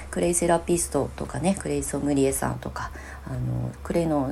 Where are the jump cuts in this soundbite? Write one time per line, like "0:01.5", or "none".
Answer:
none